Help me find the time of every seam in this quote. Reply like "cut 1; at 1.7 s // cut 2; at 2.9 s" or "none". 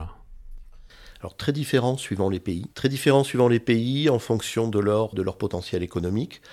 cut 1; at 2.7 s // cut 2; at 5.1 s